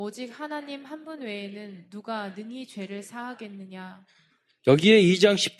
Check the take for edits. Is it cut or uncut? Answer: cut